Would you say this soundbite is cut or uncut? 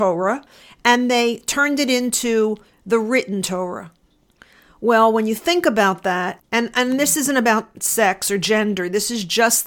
cut